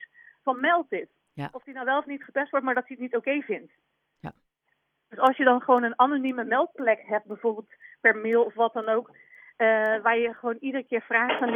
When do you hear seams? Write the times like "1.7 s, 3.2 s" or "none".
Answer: 1.2 s, 5.0 s